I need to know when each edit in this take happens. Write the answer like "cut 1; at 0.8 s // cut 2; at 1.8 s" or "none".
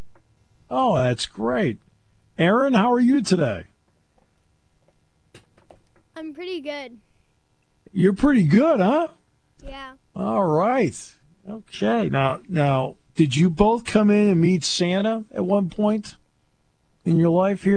none